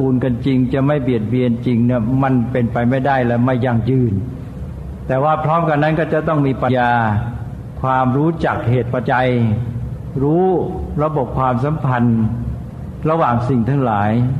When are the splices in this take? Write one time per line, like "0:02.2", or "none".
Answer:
0:06.7
0:09.0